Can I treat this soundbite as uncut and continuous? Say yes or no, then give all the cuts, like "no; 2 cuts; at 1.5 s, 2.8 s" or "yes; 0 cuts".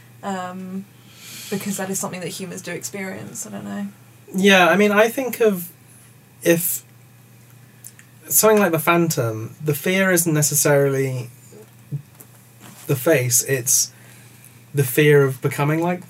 yes; 0 cuts